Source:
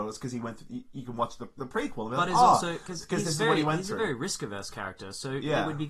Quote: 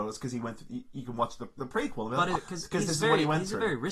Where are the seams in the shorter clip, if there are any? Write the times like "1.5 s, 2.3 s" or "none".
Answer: 2.4 s